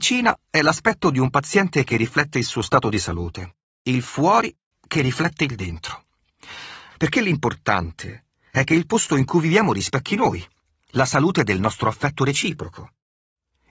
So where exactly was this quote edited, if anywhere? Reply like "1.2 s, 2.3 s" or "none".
6.9 s